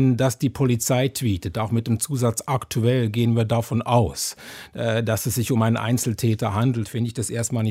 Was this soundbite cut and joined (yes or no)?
no